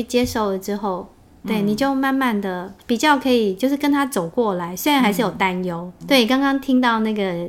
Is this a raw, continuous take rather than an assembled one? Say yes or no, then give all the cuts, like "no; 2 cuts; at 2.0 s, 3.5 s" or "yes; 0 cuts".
no; 2 cuts; at 2.8 s, 6.0 s